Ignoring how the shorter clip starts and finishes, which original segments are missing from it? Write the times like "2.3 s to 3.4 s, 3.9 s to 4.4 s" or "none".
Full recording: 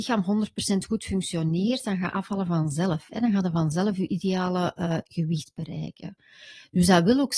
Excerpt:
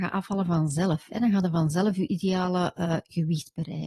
none